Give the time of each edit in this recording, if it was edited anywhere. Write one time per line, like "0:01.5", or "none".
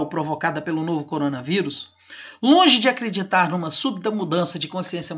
none